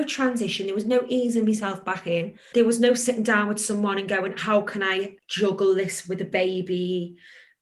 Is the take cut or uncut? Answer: cut